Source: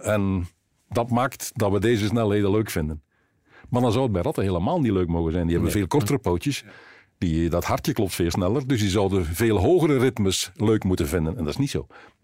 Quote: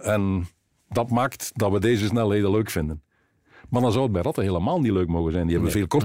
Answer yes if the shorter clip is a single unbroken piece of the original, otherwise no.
yes